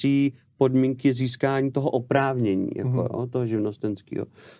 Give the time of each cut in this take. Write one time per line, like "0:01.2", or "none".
none